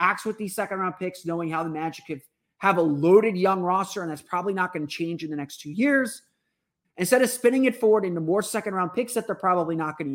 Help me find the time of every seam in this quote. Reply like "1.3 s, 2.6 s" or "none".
6.8 s